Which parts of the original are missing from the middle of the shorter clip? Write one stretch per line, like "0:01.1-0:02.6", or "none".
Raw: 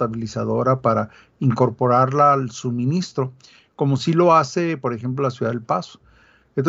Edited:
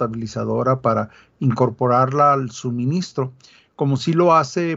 none